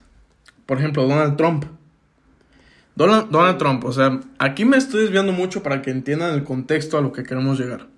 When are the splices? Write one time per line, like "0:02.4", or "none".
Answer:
none